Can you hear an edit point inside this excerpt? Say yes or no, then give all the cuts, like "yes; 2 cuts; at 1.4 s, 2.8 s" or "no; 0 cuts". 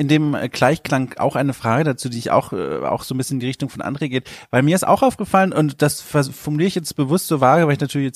no; 0 cuts